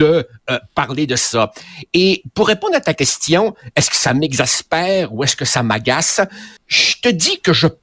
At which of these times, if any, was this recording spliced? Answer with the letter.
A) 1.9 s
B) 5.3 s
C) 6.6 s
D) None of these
C